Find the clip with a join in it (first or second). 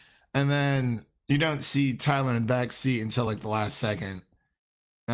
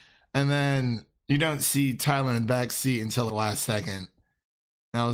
second